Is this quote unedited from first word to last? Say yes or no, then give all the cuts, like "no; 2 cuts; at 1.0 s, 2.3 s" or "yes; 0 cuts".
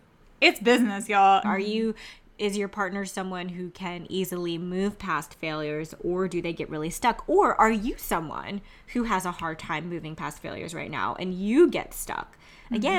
no; 1 cut; at 1.4 s